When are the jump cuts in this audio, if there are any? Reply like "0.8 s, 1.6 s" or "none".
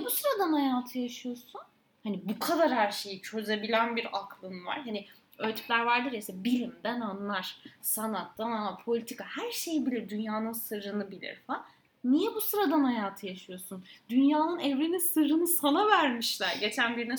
none